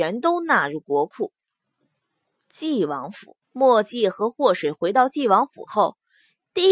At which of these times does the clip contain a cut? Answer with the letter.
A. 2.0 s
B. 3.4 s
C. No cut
B